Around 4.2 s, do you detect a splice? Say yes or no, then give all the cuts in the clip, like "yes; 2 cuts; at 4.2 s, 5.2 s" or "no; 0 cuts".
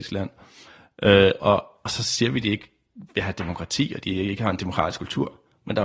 no; 1 cut; at 1.4 s